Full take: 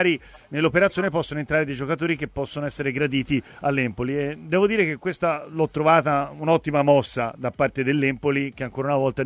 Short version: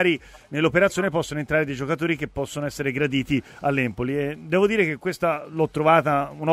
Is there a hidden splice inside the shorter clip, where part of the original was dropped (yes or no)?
no